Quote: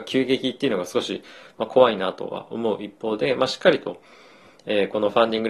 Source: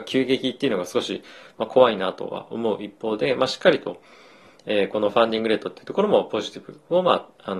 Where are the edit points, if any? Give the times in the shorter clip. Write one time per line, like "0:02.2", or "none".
none